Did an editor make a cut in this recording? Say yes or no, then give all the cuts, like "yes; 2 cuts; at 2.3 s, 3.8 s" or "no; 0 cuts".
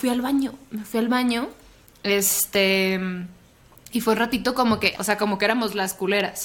yes; 1 cut; at 4.9 s